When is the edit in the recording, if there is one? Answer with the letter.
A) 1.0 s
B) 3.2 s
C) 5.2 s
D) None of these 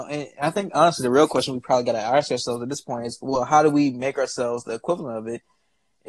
D